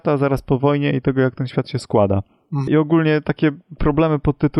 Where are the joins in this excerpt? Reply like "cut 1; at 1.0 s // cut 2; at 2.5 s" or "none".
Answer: cut 1; at 2.7 s